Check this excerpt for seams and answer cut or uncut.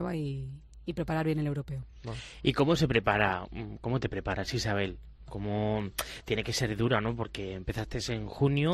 uncut